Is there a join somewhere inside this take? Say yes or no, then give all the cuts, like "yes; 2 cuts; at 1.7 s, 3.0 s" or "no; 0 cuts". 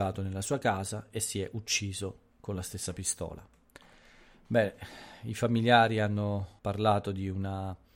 yes; 1 cut; at 6.6 s